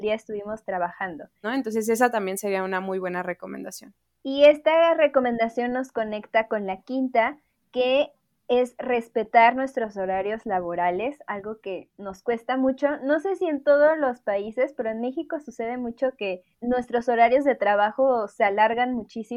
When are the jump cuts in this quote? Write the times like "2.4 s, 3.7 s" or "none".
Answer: 1.4 s, 16.5 s